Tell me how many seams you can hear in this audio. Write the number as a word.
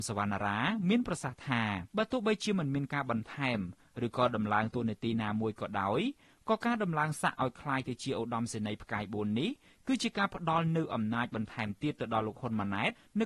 one